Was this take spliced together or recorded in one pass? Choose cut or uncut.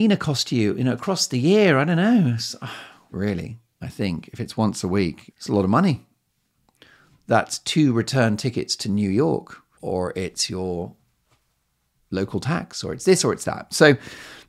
cut